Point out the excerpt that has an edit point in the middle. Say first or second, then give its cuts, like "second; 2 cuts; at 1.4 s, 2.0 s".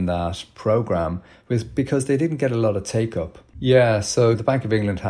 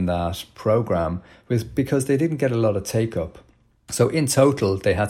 first; 1 cut; at 3.5 s